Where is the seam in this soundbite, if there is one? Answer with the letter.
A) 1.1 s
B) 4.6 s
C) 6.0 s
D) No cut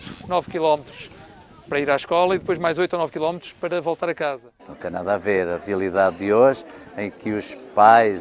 B